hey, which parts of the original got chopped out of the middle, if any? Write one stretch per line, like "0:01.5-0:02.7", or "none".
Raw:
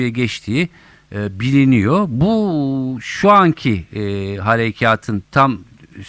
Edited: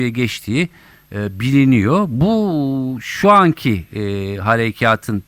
none